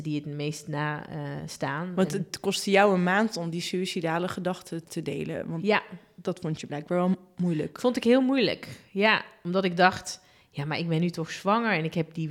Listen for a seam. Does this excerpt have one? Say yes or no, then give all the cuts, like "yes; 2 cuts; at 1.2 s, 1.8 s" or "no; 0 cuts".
yes; 1 cut; at 4.8 s